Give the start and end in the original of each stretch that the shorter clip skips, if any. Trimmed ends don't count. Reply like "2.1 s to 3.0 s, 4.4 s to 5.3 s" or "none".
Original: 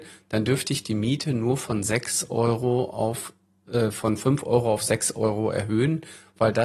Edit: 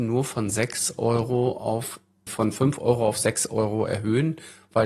3.6 s to 3.9 s